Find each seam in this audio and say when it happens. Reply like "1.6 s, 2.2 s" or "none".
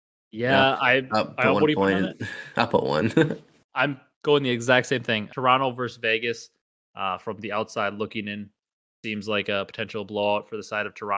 5.3 s